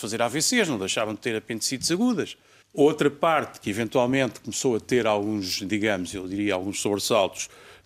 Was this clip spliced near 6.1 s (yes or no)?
no